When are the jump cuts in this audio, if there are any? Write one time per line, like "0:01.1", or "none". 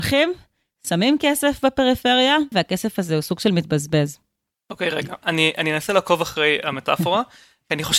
0:02.5